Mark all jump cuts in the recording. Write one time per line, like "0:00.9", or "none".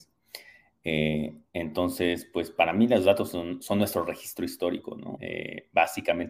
0:05.2